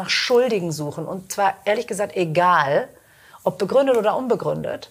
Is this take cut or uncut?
uncut